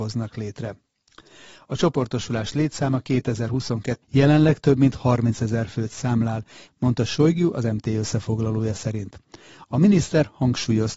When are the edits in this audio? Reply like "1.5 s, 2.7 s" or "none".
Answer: 4.0 s, 6.7 s